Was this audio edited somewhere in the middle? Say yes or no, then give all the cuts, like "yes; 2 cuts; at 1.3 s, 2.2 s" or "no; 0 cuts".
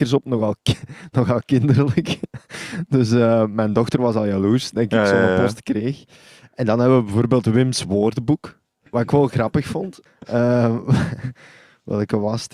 yes; 1 cut; at 10.1 s